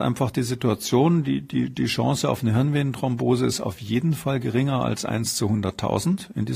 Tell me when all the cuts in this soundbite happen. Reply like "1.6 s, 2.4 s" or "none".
none